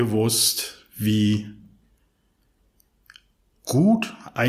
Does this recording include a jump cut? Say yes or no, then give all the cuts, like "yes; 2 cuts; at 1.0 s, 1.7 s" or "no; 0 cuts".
no; 0 cuts